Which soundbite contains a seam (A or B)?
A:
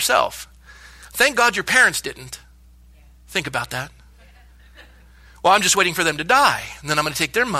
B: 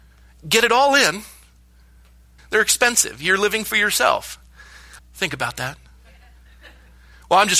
B